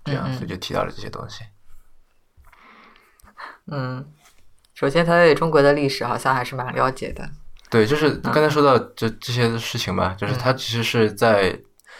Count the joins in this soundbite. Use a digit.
1